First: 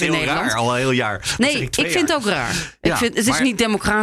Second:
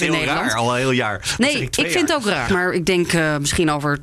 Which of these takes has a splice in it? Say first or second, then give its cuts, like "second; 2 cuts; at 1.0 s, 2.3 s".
second; 1 cut; at 2.5 s